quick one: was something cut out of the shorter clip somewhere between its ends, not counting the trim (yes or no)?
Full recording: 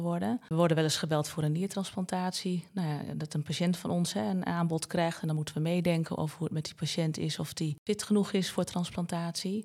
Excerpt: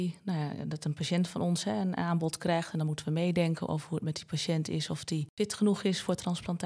no